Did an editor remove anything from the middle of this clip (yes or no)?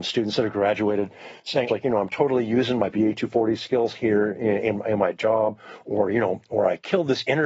yes